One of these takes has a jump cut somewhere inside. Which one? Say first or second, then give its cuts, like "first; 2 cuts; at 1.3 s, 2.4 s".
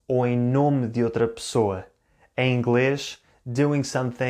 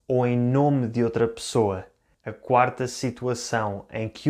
second; 1 cut; at 2.1 s